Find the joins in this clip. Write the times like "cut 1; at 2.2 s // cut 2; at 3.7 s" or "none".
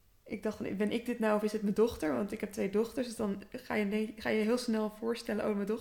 none